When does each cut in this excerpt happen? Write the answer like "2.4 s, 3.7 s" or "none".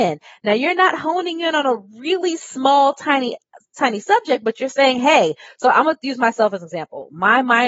none